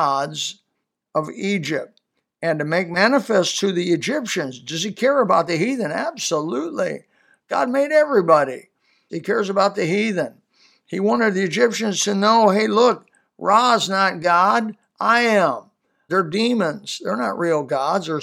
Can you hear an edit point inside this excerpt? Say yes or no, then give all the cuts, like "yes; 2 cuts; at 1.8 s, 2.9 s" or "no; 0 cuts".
yes; 2 cuts; at 9.1 s, 16.1 s